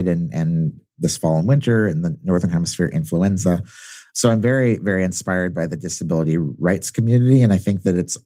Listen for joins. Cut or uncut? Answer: uncut